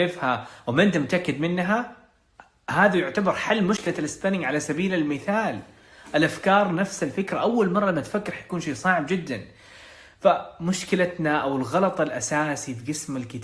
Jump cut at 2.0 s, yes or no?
no